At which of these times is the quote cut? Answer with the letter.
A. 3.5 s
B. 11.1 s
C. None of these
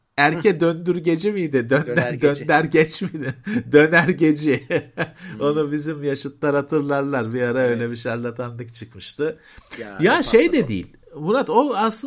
C